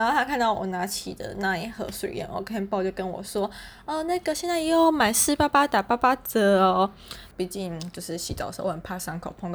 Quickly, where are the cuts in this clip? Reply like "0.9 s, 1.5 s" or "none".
7.3 s